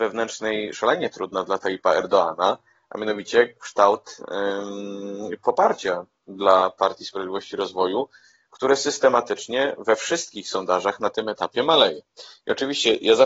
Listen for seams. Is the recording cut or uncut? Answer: uncut